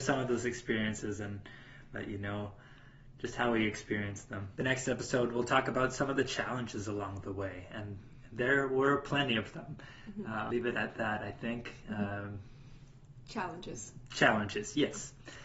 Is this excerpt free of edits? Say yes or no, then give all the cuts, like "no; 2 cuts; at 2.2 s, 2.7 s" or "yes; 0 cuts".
no; 2 cuts; at 4.6 s, 10.5 s